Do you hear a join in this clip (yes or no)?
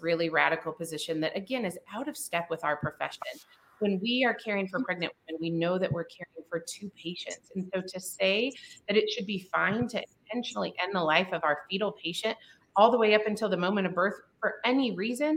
no